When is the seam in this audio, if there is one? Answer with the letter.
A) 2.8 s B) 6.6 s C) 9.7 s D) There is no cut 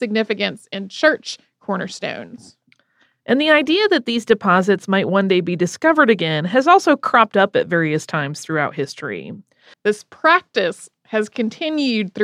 C